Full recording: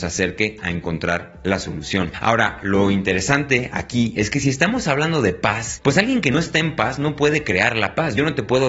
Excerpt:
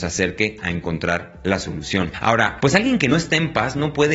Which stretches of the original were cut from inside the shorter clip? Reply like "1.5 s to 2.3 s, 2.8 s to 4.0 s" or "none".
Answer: 2.6 s to 5.8 s